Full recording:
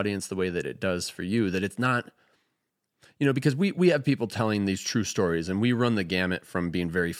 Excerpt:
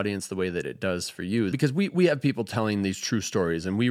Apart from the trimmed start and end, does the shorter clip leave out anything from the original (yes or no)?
yes